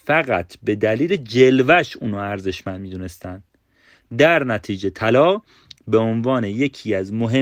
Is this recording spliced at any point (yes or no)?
no